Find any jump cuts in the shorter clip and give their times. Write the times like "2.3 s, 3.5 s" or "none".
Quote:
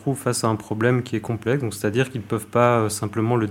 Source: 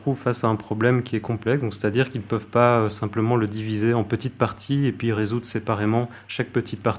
none

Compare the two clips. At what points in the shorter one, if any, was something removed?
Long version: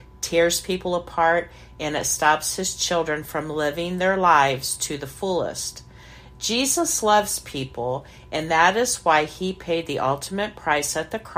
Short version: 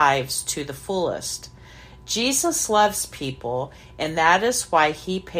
none

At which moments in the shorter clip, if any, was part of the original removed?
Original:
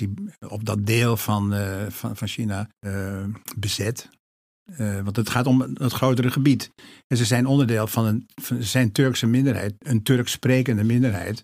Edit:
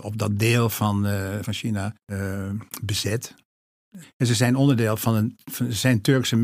1.4 s, 4.0 s

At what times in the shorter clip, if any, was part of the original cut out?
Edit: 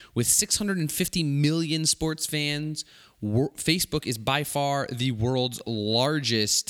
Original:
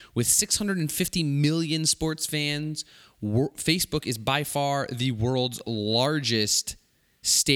none

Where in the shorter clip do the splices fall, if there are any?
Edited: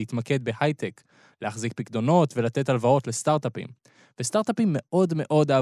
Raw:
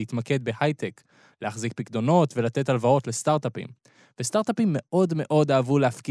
none

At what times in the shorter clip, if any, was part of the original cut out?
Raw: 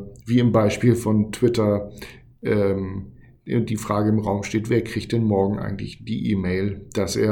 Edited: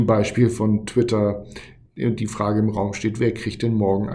1.9 s

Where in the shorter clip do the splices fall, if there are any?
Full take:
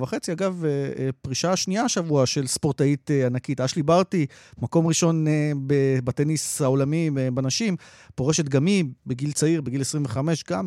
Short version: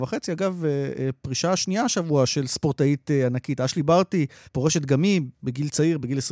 4.4 s

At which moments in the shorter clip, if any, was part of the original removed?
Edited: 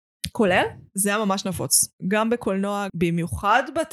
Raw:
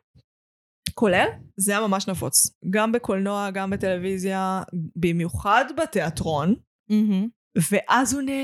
2.9 s

